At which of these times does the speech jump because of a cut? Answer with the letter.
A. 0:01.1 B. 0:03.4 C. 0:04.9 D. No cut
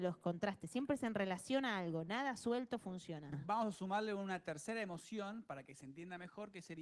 D